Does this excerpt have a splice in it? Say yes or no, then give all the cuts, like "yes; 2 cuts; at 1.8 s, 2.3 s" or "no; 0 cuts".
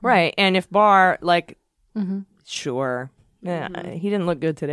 yes; 2 cuts; at 1.9 s, 3.2 s